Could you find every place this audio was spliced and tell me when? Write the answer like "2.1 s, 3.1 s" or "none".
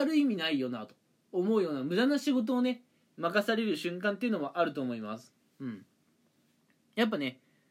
none